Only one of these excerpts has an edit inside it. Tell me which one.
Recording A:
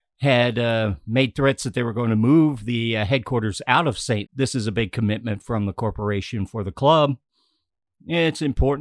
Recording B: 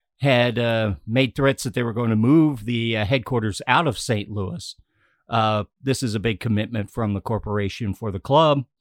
A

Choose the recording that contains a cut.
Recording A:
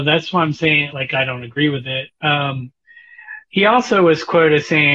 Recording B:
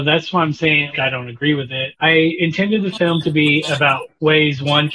B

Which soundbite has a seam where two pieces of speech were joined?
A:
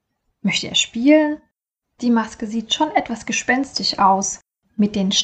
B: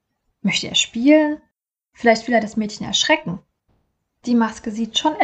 A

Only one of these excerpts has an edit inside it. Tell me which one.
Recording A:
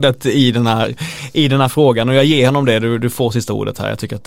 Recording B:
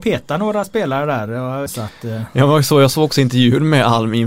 B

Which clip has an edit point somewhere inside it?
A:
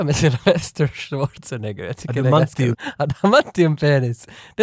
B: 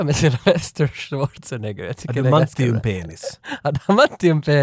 A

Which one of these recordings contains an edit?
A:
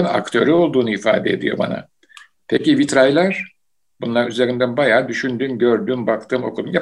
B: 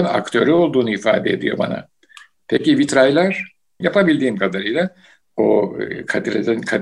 B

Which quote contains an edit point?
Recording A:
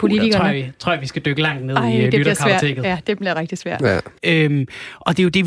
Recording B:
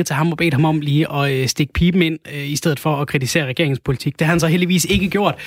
A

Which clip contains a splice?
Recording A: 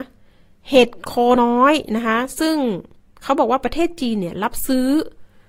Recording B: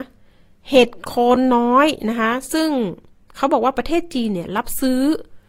A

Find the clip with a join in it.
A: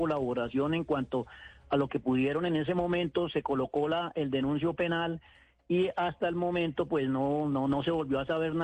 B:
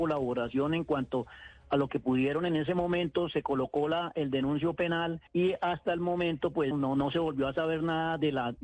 B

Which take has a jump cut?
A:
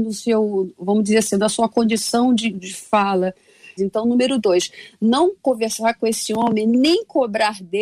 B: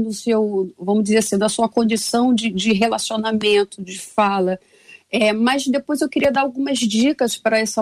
A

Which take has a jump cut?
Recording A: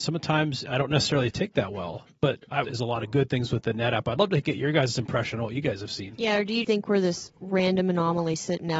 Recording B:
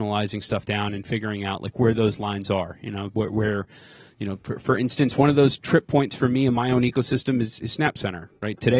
A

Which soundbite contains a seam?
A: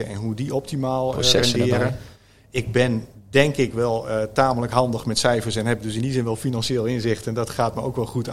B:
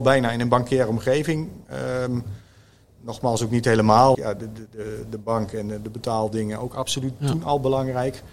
B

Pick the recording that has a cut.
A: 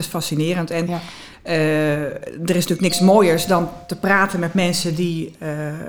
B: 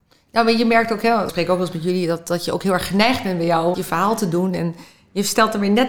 B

